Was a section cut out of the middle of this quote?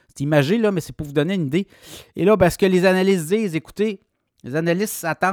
no; 0 cuts

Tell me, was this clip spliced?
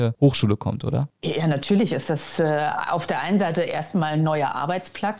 no; 0 cuts

